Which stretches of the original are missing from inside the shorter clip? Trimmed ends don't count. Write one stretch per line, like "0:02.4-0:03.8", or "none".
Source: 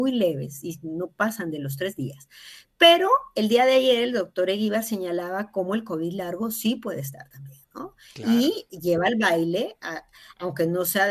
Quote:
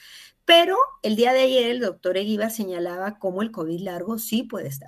none